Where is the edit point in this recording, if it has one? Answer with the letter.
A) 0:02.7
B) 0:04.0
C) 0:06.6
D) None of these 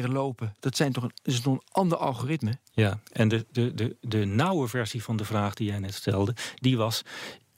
A